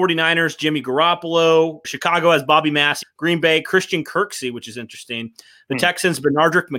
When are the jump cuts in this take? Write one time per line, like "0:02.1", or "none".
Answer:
0:01.8
0:03.0